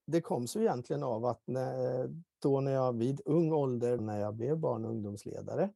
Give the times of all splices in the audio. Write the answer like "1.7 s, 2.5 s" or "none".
4.0 s